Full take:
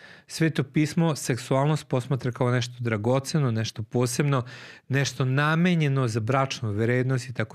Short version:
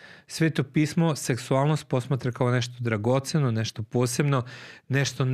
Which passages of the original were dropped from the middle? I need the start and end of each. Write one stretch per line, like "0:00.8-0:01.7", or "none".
none